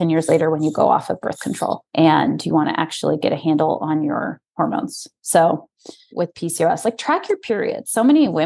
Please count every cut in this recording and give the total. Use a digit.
2